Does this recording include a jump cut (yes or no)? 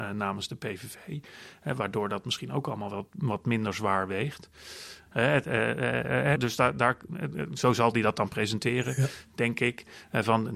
yes